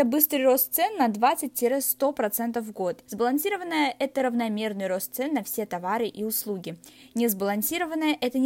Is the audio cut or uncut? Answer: cut